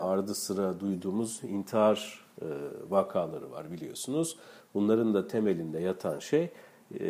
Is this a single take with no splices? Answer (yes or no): yes